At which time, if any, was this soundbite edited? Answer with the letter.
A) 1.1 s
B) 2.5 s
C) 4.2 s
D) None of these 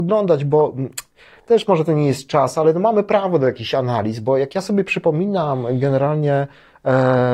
D